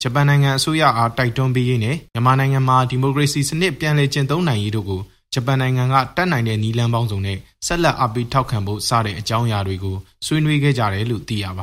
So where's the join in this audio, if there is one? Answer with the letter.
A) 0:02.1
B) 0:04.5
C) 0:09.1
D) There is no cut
A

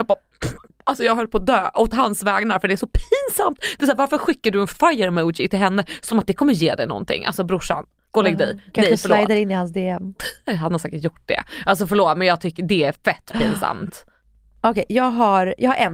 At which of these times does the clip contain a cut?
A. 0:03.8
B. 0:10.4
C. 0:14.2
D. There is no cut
D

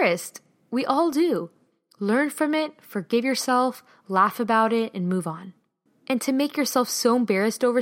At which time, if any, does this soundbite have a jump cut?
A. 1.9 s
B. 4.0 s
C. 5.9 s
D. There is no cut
C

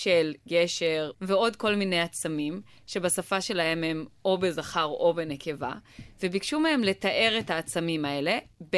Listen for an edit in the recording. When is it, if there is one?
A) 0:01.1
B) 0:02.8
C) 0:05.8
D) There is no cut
A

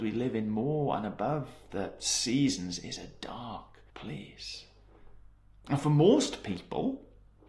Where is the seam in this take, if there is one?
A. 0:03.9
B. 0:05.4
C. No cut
A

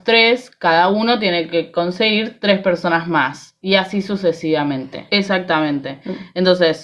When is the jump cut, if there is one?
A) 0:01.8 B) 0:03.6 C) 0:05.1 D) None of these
C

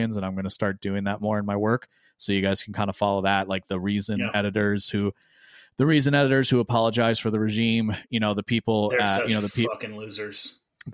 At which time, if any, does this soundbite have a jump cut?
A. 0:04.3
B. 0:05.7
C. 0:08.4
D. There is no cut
D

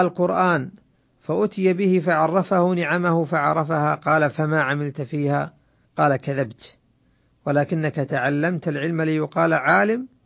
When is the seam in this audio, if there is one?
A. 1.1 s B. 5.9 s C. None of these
B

